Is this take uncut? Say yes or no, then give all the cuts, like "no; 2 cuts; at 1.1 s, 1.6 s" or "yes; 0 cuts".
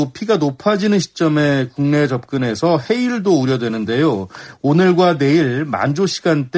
yes; 0 cuts